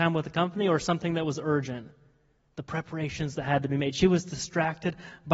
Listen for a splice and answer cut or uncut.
uncut